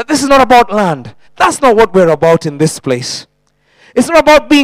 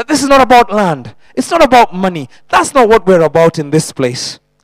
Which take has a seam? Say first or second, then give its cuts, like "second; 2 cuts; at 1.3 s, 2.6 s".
first; 1 cut; at 1.3 s